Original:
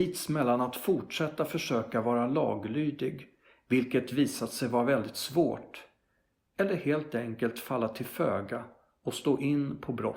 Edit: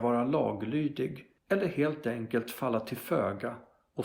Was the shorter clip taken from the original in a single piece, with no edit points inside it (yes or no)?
no